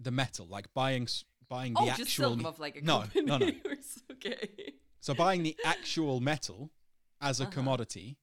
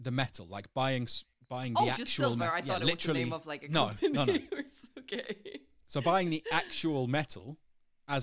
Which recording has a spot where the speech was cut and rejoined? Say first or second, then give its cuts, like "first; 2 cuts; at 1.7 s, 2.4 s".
first; 1 cut; at 2.4 s